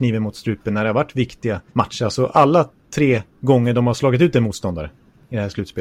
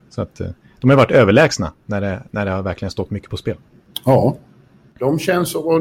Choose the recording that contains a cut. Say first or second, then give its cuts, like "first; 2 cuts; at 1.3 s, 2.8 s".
first; 1 cut; at 1.7 s